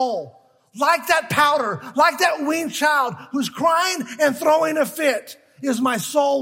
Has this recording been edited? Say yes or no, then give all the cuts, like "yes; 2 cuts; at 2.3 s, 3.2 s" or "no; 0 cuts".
no; 0 cuts